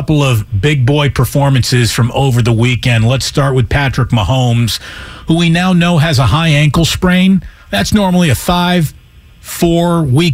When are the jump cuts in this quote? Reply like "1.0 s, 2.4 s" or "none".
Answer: none